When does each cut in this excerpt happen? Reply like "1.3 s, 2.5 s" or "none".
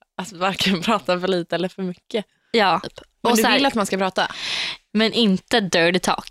2.8 s, 4.9 s